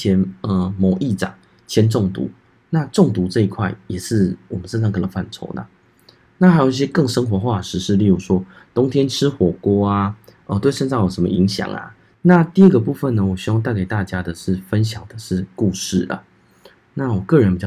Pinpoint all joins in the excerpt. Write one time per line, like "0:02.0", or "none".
0:12.1